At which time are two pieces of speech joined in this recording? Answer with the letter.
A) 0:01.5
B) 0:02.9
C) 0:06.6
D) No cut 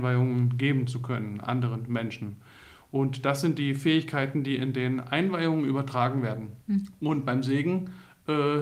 C